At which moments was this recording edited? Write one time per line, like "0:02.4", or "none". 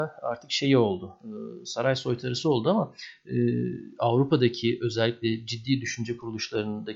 none